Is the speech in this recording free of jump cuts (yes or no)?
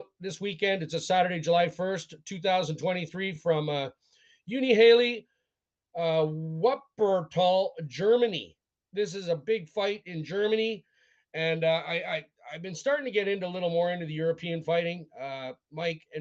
yes